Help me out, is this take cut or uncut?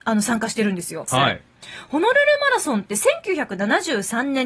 cut